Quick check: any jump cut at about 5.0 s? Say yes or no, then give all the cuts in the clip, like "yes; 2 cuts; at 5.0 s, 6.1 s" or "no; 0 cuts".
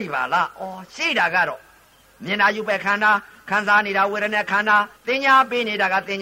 yes; 1 cut; at 5.0 s